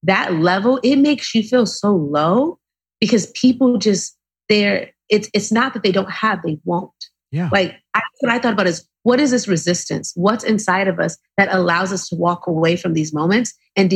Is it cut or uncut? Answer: uncut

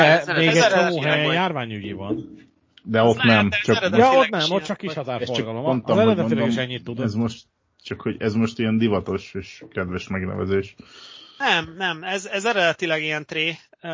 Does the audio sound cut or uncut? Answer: uncut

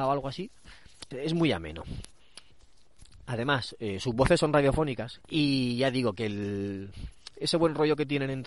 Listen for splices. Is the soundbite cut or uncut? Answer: cut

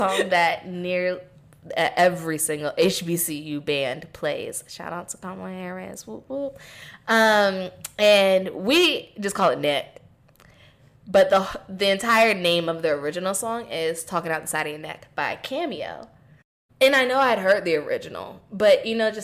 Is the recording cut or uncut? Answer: uncut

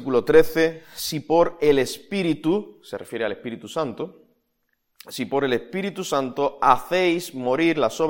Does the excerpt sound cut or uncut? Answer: uncut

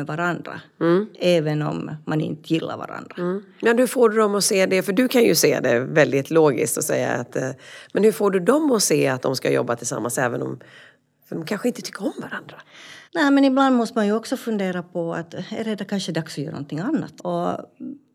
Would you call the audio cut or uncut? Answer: cut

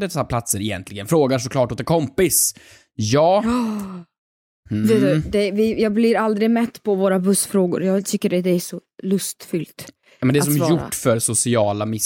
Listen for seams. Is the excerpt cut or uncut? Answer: uncut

